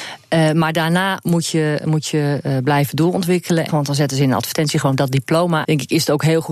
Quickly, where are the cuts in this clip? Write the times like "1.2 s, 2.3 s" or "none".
3.7 s, 5.6 s